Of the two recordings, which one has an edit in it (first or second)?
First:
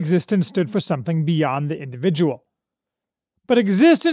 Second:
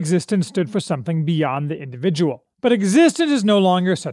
second